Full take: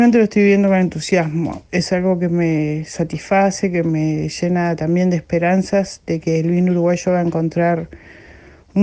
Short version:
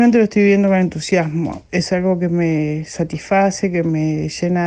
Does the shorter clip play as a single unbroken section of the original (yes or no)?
yes